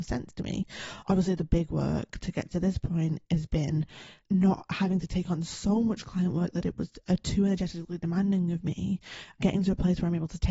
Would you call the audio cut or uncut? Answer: uncut